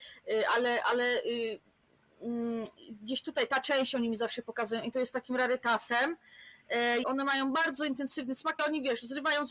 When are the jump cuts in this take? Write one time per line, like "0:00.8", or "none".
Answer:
0:07.0
0:08.6